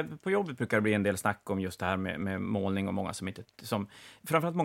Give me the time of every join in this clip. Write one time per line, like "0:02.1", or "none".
none